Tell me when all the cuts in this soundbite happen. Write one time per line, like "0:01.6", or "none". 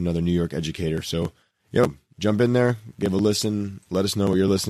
none